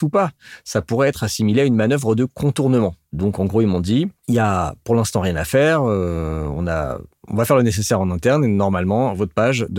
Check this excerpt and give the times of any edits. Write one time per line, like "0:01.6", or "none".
none